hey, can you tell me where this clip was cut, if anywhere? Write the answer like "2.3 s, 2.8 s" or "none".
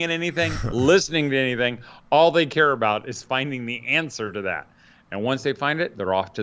none